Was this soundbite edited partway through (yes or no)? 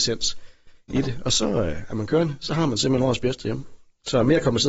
no